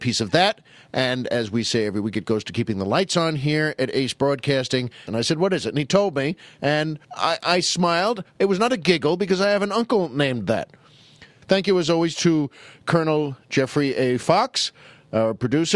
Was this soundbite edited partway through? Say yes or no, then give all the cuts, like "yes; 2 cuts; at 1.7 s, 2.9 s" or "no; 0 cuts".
yes; 3 cuts; at 5.1 s, 7.0 s, 11.4 s